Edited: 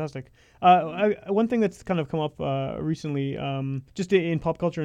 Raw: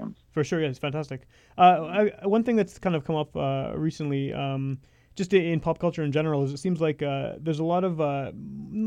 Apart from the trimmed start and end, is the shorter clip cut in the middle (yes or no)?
yes